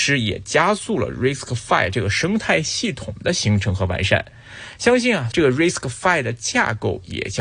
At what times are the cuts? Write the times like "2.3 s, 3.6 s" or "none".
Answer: 5.3 s

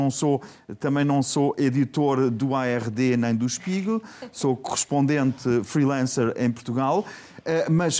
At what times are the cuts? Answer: none

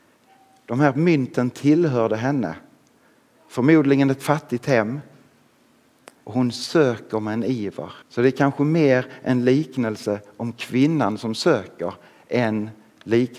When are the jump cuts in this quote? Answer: 6.2 s, 8.0 s

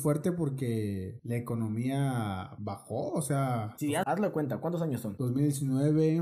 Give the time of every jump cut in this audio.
4.0 s

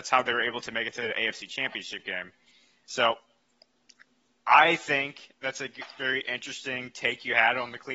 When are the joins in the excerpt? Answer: none

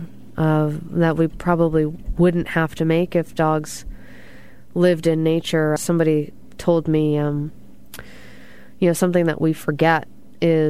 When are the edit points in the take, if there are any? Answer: 5.8 s

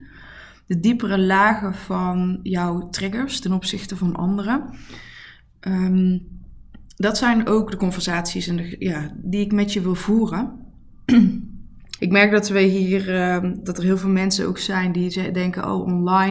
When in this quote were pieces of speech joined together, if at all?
12.0 s, 13.6 s

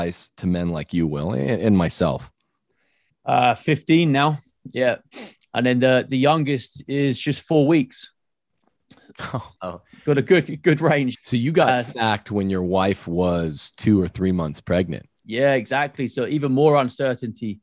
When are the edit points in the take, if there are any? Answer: 3.1 s, 9.6 s, 11.1 s

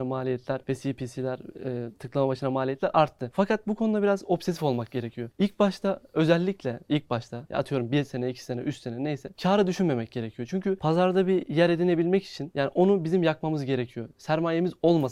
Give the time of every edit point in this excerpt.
none

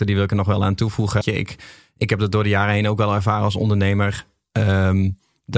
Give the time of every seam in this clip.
1.2 s

